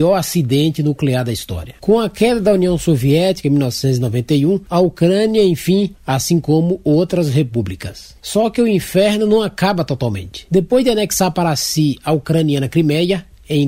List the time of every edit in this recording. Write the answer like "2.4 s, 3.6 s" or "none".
5.9 s